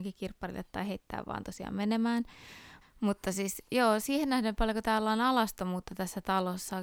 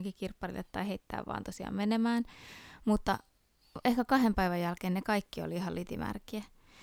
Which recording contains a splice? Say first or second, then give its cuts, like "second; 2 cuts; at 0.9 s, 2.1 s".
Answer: first; 1 cut; at 2.8 s